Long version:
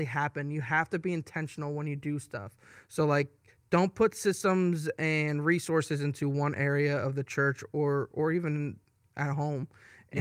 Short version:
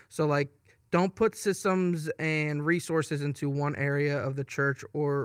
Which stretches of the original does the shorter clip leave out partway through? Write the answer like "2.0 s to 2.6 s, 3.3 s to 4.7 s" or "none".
none